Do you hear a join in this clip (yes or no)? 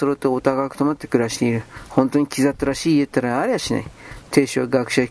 no